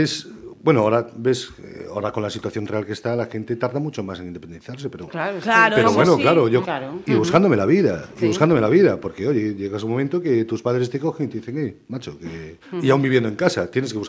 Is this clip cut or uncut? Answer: cut